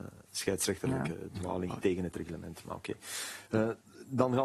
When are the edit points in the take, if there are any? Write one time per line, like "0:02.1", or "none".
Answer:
none